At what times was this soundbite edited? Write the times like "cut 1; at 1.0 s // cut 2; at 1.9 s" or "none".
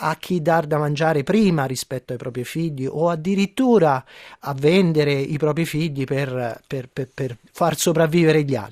cut 1; at 7.5 s